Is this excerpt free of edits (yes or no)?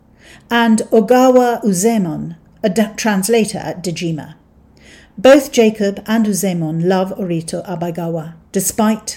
yes